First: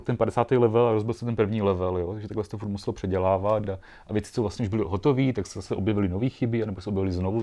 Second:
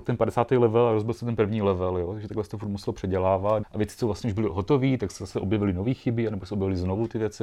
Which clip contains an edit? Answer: second; 1 cut; at 3.6 s

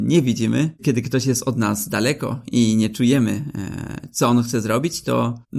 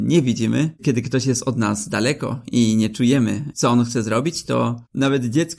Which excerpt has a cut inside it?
second; 1 cut; at 3.5 s

